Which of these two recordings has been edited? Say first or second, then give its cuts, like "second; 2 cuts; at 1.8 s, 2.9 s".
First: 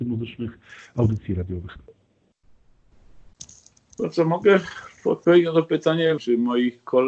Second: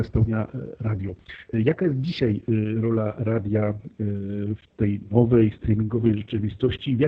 first; 1 cut; at 6.2 s